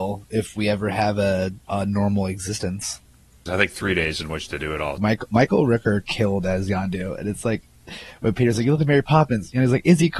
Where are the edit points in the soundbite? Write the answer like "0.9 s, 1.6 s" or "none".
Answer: 3.5 s, 5.0 s